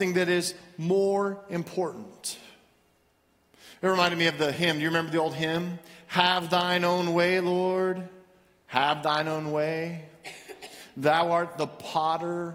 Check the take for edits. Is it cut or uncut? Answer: uncut